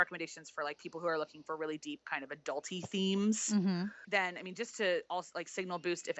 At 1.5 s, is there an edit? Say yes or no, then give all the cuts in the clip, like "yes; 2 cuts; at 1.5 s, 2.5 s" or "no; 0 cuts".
no; 1 cut; at 4.0 s